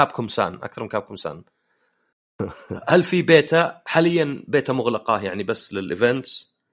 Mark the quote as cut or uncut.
uncut